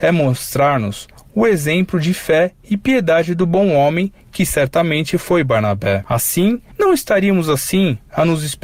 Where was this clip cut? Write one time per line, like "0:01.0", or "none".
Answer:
0:06.7